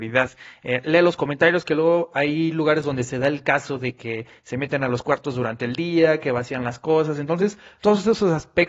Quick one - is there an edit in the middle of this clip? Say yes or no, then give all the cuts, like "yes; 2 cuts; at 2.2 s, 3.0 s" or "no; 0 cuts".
no; 0 cuts